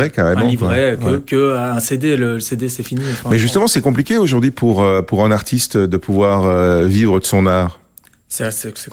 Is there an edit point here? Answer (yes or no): no